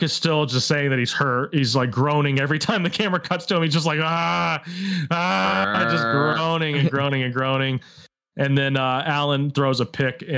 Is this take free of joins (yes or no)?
yes